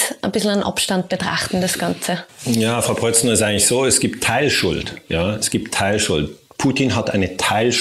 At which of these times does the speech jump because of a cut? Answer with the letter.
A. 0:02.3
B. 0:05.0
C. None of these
C